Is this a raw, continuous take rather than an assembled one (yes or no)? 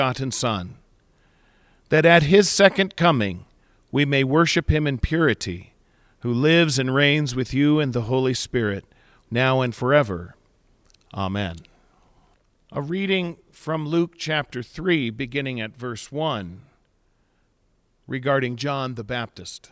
no